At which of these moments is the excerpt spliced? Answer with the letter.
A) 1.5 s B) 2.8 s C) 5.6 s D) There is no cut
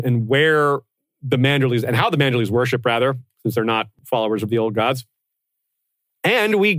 D